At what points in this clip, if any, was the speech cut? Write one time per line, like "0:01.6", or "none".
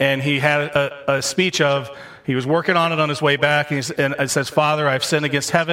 none